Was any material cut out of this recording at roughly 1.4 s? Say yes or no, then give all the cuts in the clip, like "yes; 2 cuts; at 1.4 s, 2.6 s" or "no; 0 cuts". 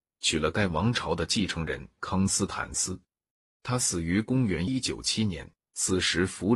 no; 2 cuts; at 3.6 s, 4.7 s